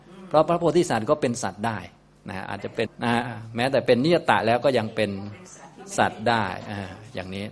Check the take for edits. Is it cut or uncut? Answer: cut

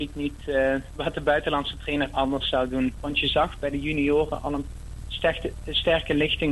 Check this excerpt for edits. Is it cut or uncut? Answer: cut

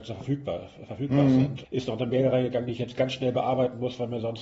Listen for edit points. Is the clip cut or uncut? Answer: cut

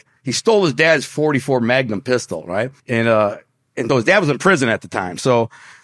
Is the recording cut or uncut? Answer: cut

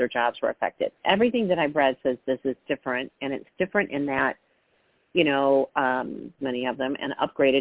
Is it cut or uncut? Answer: cut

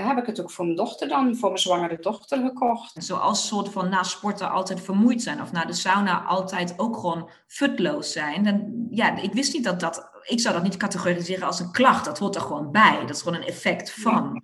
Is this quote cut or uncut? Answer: cut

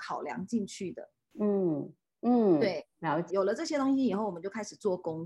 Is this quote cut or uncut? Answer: cut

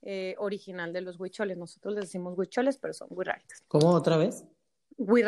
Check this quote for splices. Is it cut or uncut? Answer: uncut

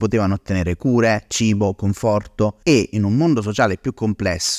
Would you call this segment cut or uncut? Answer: uncut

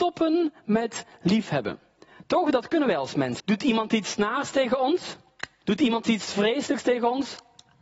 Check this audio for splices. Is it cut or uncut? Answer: cut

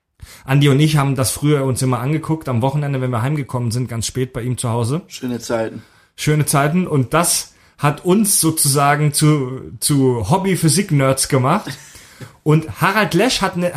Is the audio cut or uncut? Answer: uncut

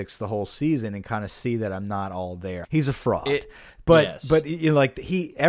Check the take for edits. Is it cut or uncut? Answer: cut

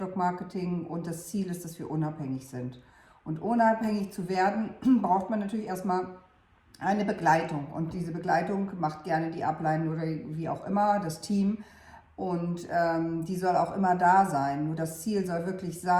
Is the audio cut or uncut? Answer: uncut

